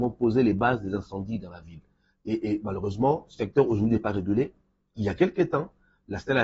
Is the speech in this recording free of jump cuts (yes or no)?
yes